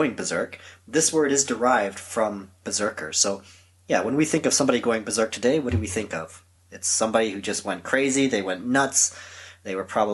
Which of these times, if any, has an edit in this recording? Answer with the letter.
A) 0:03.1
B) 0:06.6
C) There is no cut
C